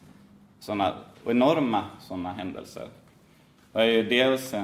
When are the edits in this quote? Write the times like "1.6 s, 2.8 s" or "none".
none